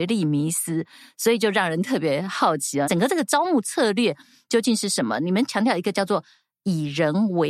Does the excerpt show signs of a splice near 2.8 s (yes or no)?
yes